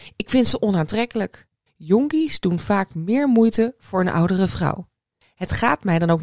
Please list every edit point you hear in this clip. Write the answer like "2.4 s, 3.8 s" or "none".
1.7 s